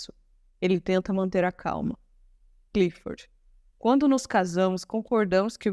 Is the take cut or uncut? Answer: uncut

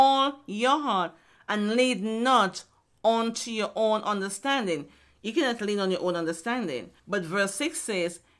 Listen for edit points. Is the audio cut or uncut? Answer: uncut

